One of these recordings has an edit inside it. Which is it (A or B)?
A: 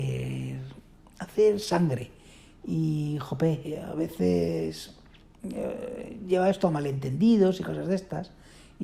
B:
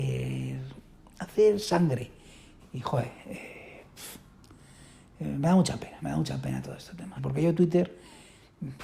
B